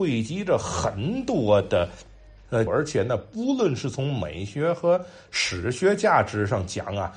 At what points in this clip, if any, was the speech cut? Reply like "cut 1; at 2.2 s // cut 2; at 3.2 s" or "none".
cut 1; at 2.7 s